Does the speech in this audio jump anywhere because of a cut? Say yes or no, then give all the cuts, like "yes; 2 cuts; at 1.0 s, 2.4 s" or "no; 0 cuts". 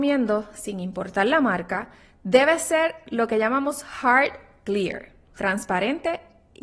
no; 0 cuts